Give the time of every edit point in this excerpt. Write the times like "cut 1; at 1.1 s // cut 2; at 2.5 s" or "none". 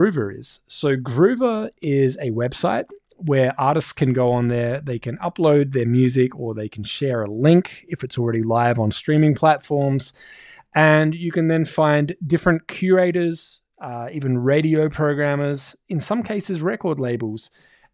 none